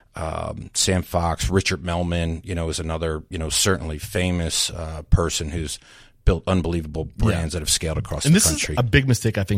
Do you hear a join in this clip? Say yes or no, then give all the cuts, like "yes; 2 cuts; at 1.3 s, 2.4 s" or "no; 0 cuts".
no; 0 cuts